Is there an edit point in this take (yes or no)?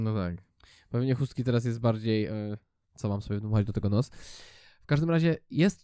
no